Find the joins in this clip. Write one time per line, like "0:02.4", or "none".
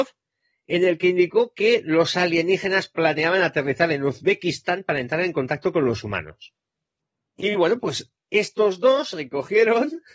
0:07.3